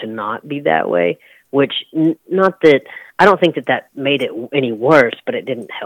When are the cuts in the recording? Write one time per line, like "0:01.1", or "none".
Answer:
0:03.1